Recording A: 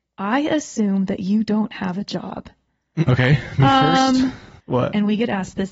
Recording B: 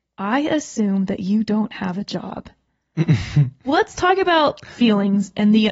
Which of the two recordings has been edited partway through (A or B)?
A